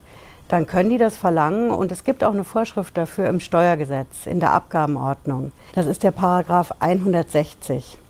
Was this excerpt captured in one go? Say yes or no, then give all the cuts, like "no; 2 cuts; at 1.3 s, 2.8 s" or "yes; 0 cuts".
no; 1 cut; at 5.7 s